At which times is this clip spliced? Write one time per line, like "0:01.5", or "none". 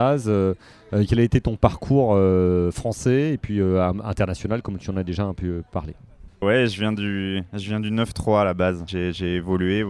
0:08.9